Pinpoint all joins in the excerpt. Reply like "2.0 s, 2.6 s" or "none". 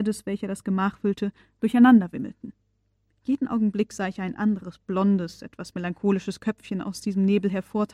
none